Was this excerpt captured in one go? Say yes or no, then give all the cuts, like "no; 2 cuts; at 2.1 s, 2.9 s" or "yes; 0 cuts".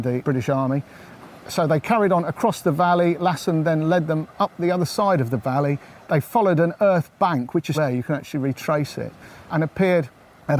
no; 2 cuts; at 7.7 s, 9.5 s